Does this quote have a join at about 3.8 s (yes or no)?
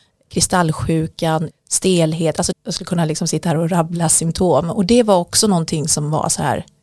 no